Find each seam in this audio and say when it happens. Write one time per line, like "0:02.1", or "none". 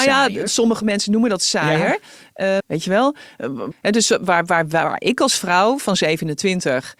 0:02.6
0:03.7